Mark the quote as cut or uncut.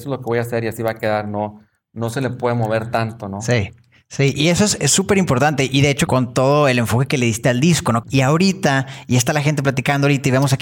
cut